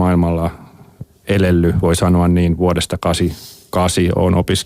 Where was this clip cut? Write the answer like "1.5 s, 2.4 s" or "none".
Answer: none